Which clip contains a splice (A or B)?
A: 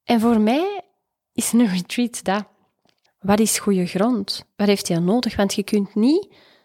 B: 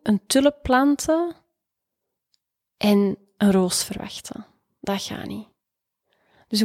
A